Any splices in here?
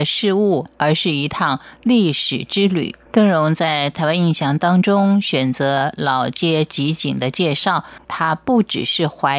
yes; 2 cuts; at 3.1 s, 8.0 s

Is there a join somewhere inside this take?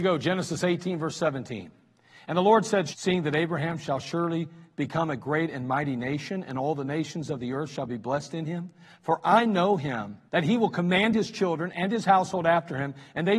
yes; 2 cuts; at 2.9 s, 10.3 s

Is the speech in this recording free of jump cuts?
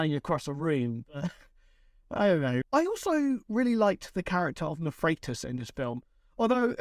no; 1 cut; at 2.6 s

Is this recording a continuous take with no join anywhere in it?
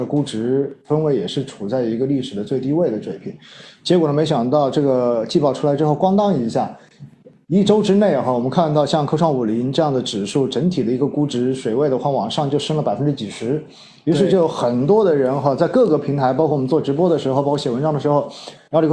yes; 0 cuts

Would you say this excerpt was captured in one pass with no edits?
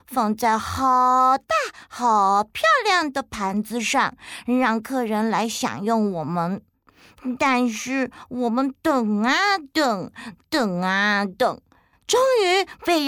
yes; 0 cuts

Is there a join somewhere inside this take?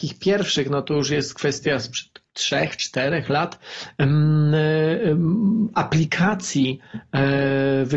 yes; 1 cut; at 2.3 s

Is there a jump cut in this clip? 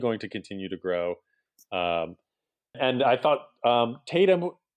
yes; 1 cut; at 2.7 s

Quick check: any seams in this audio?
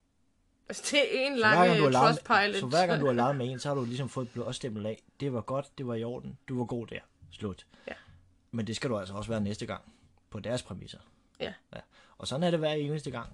no; 0 cuts

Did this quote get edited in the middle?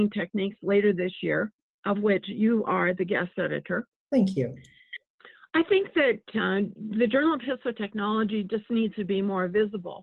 no; 0 cuts

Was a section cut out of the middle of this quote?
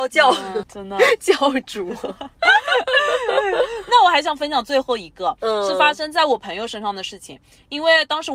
no; 0 cuts

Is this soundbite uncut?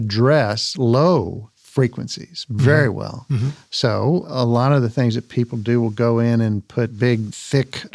yes; 0 cuts

